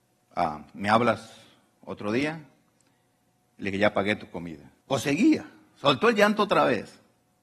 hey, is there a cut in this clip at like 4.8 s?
yes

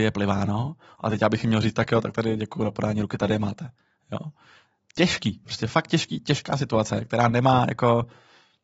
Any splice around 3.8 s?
no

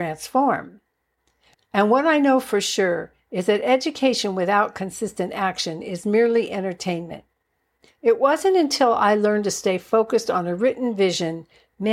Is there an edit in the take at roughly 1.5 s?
yes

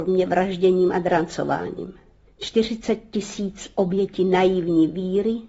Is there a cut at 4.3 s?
no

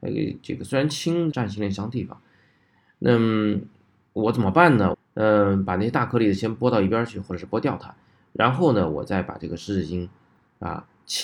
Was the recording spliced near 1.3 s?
yes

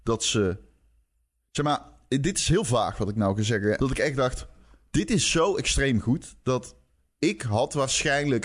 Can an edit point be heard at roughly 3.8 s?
yes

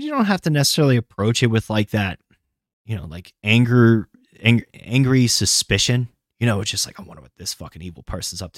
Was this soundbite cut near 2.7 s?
no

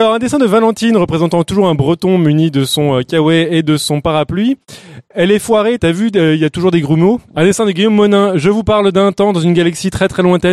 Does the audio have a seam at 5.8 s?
yes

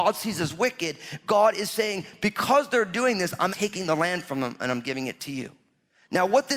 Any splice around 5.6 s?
no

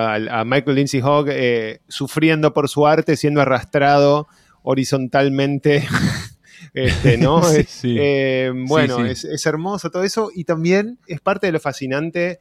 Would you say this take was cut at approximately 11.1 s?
yes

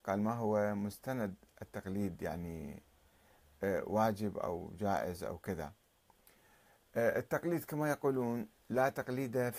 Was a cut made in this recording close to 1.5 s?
yes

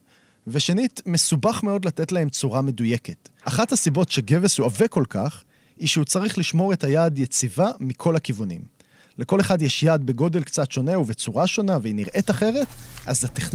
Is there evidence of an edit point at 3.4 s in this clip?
yes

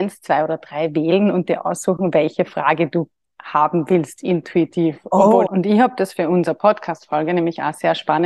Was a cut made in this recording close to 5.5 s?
yes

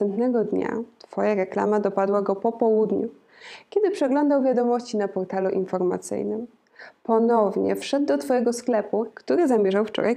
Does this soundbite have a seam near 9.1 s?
yes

